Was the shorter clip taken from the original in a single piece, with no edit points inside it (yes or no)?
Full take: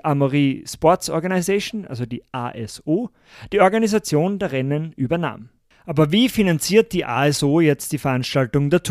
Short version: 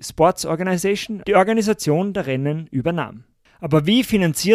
no